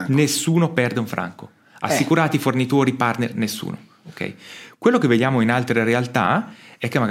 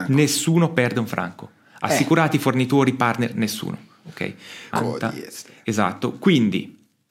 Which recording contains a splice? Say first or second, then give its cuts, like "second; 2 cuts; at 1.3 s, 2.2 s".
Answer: second; 1 cut; at 4.7 s